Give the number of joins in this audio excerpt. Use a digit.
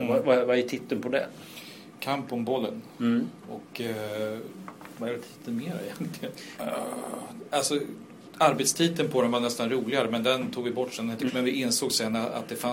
2